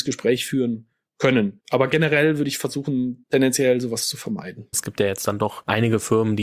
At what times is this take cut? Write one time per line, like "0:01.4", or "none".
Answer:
0:01.6
0:04.7